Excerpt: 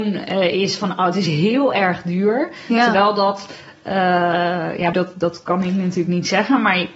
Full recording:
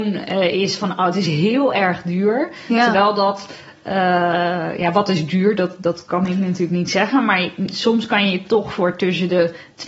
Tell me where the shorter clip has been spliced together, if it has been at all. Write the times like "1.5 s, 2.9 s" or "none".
4.9 s